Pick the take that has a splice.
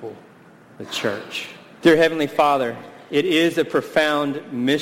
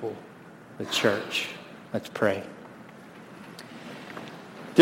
first; 1 cut; at 1.8 s

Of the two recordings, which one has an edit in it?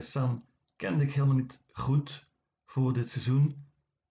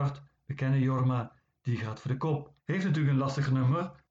second; 1 cut; at 2.6 s

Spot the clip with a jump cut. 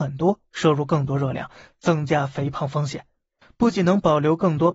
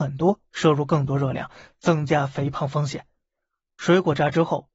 first; 1 cut; at 3.4 s

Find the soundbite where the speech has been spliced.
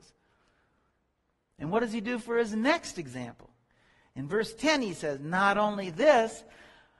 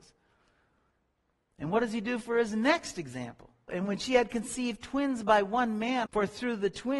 second; 2 cuts; at 3.7 s, 6.1 s

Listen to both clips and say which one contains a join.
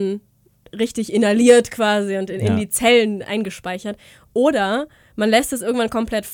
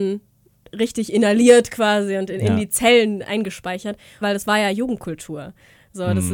second; 1 cut; at 4.2 s

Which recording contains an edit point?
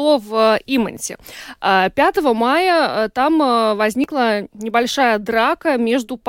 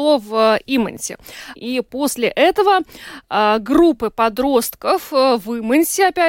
second; 1 cut; at 1.6 s

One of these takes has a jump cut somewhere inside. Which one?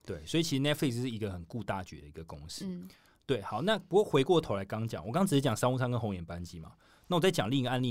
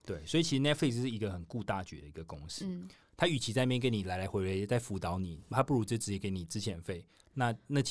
second; 2 cuts; at 3.0 s, 5.5 s

